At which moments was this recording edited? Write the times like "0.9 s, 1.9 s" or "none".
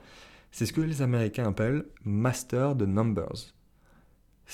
2.0 s